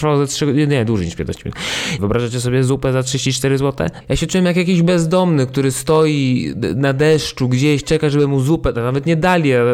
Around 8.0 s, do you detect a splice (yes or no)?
no